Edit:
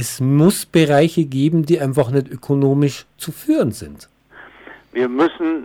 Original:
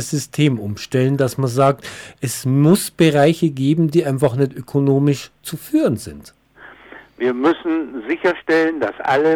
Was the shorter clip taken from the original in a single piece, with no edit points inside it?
yes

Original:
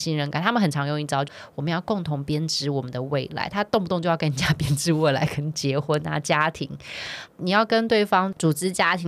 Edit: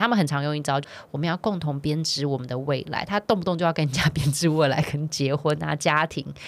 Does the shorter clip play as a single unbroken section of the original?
yes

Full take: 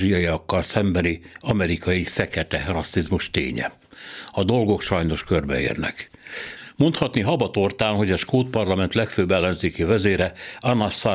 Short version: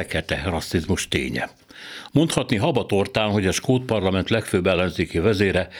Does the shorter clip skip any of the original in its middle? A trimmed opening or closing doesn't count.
yes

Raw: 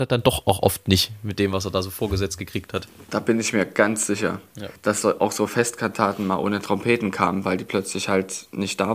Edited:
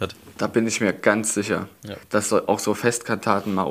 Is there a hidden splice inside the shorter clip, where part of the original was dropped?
no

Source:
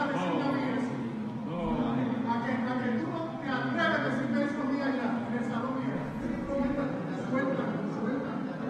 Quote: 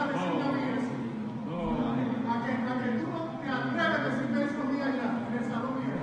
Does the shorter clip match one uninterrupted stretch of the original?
yes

